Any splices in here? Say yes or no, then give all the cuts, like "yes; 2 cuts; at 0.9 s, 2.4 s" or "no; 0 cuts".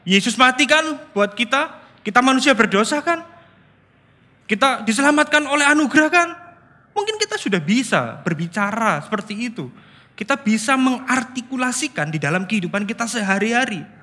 no; 0 cuts